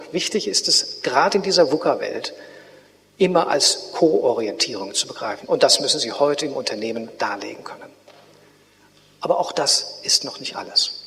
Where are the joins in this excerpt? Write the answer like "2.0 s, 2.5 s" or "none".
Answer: 1.0 s, 5.4 s